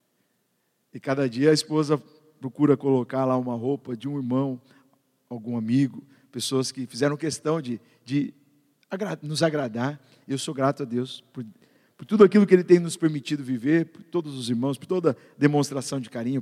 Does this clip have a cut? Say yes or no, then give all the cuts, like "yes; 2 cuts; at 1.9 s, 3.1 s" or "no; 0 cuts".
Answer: no; 0 cuts